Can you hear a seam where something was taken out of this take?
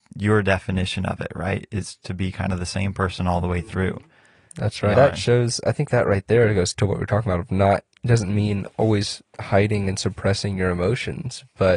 yes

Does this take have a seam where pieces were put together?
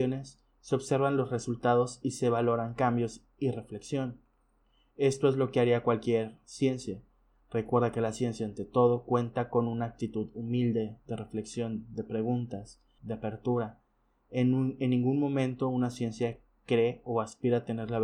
yes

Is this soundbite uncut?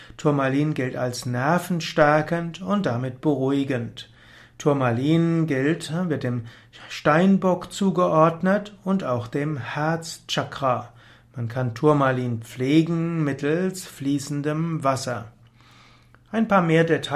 yes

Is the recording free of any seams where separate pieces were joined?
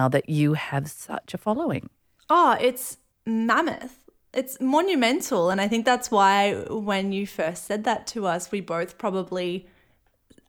yes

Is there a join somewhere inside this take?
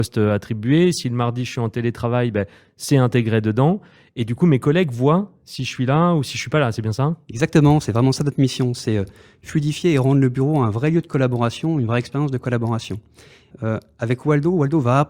yes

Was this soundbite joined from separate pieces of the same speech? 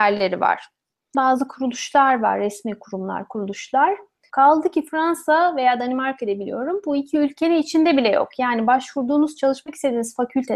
yes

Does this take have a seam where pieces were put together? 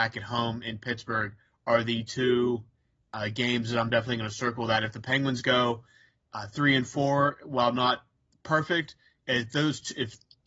no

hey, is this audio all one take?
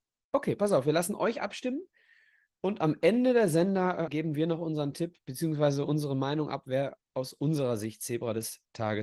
no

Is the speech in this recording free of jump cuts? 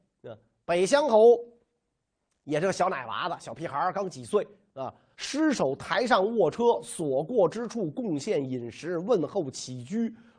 no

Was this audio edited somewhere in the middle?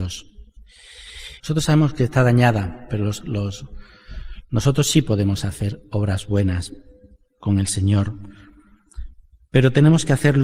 yes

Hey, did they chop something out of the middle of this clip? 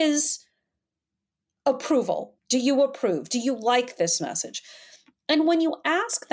yes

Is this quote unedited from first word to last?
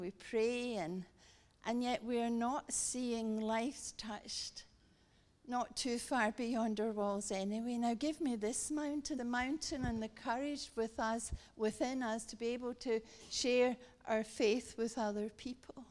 no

